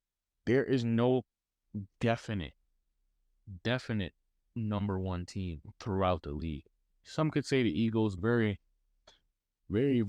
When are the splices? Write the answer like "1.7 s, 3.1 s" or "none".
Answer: 8.2 s